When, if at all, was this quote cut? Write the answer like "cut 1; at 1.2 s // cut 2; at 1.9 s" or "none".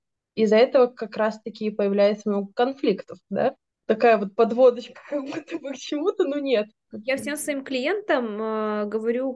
cut 1; at 3.8 s